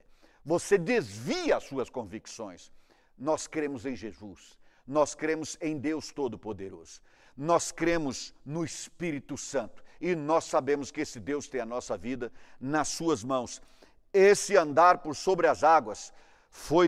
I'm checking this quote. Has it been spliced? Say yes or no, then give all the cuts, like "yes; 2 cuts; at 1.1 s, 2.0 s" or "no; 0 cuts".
no; 0 cuts